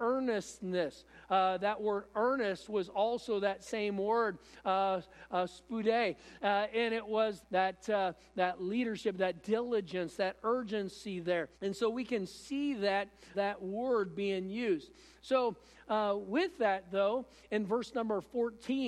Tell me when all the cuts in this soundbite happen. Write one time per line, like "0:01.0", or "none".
0:07.4
0:11.5
0:13.3